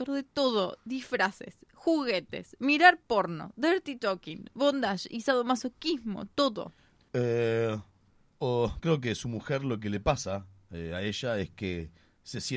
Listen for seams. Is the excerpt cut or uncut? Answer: cut